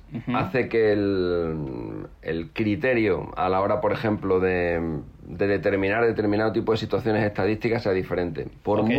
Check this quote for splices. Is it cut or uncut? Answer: uncut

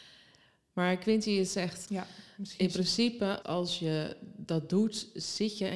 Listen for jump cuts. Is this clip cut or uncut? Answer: cut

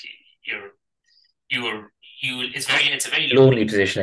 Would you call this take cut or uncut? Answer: uncut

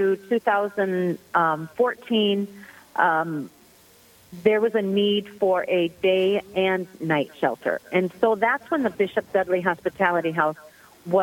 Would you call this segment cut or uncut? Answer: uncut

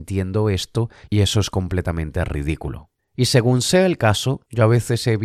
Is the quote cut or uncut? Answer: cut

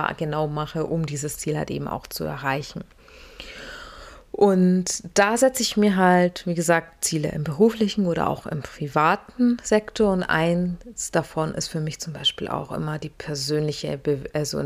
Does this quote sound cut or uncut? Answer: uncut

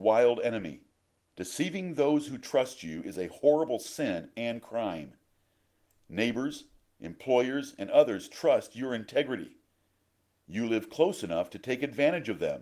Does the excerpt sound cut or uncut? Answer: cut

